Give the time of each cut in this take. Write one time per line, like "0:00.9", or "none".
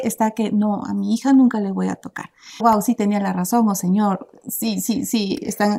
0:02.6